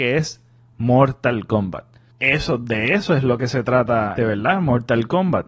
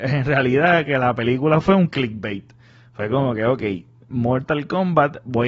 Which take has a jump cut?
first; 2 cuts; at 2.1 s, 4.2 s

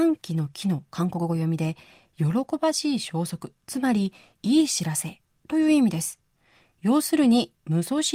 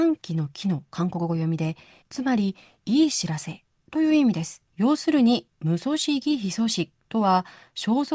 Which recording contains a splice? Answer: second; 2 cuts; at 2.0 s, 4.7 s

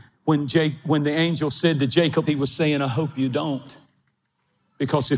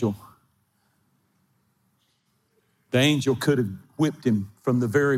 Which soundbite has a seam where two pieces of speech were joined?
first; 1 cut; at 2.2 s

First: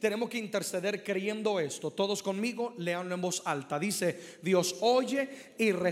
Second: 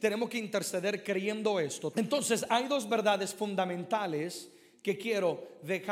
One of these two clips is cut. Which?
second; 1 cut; at 1.9 s

